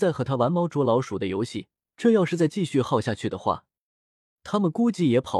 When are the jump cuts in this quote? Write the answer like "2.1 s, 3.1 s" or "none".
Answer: 1.9 s